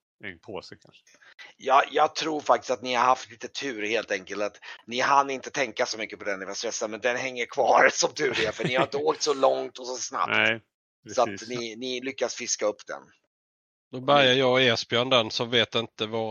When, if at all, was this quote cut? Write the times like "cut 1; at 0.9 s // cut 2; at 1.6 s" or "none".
none